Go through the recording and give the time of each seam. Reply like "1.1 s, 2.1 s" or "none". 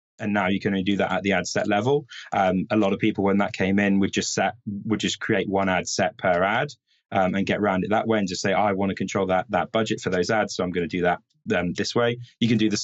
none